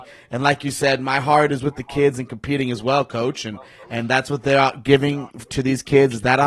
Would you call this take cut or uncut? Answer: uncut